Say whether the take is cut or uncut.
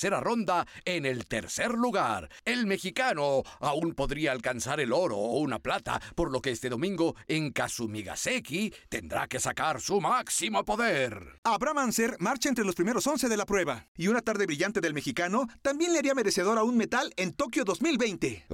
uncut